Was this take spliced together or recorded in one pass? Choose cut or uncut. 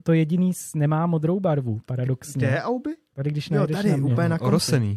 uncut